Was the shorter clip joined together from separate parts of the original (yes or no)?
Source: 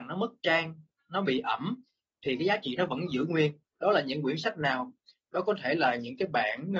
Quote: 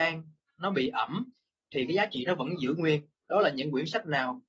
no